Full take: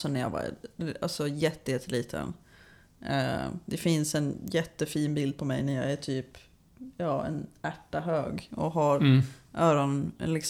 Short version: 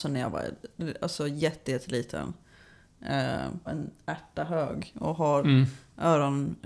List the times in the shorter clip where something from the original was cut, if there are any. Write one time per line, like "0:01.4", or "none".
0:03.7